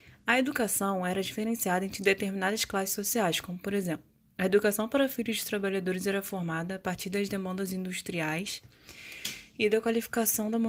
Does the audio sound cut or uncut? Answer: uncut